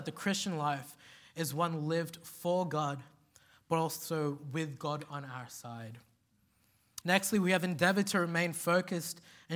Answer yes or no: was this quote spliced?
yes